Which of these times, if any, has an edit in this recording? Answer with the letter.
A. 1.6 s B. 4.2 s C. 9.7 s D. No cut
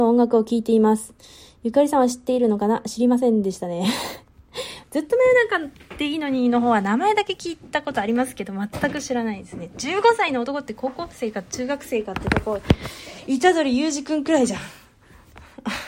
D